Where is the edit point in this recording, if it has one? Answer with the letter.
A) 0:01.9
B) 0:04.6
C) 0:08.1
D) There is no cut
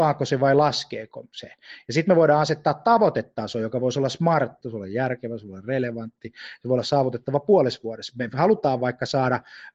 B